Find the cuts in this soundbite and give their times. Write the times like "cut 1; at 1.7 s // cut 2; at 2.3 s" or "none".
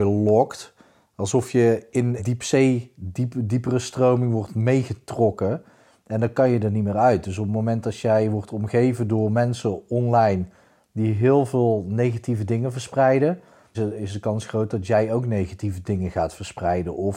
cut 1; at 2.2 s // cut 2; at 13.7 s